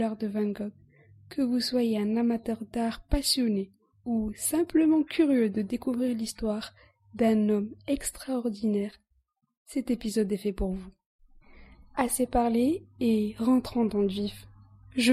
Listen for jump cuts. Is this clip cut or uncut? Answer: uncut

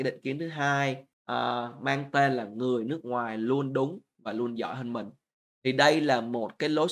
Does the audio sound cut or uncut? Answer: cut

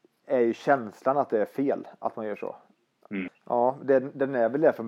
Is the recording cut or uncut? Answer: cut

